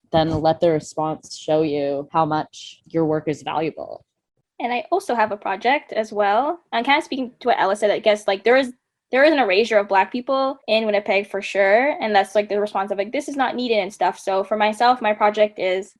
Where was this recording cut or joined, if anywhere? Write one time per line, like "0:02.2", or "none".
none